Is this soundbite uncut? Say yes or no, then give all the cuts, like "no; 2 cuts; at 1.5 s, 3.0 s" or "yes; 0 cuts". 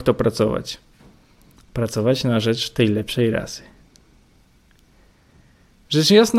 yes; 0 cuts